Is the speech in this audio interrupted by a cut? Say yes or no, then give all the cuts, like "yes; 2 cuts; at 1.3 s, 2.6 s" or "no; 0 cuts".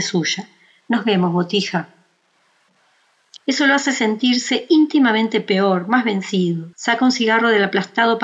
yes; 2 cuts; at 3.4 s, 6.7 s